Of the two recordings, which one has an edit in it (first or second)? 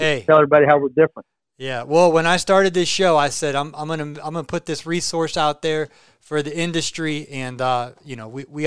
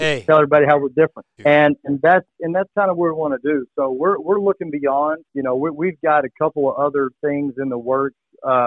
second